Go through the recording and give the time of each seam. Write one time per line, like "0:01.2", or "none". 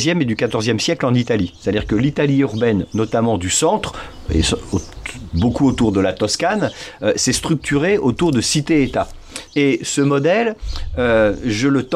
0:09.5